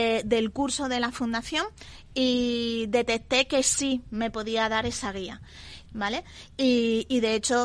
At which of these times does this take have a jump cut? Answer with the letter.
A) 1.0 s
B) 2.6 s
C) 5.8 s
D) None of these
C